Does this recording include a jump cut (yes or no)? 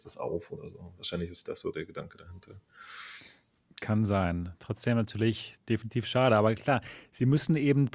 no